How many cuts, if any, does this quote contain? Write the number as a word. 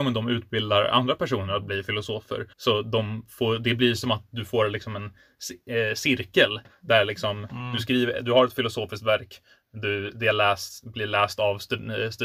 one